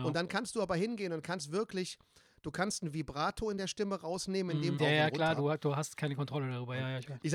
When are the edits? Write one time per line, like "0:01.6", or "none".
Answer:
0:04.8